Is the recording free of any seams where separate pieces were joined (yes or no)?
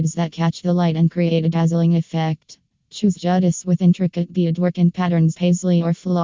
no